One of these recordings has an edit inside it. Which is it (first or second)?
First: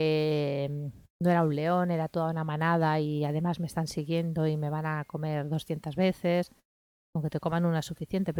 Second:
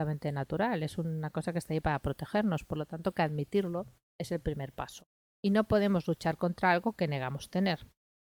second